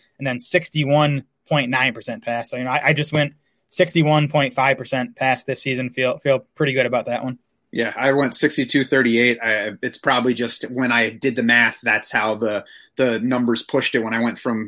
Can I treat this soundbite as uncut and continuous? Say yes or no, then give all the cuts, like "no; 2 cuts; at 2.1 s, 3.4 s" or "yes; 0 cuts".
yes; 0 cuts